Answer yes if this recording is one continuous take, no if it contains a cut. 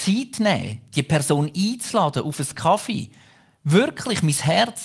yes